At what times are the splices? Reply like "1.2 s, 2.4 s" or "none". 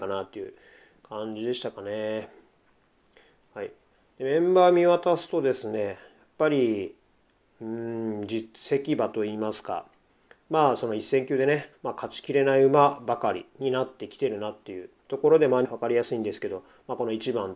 11.7 s, 15.6 s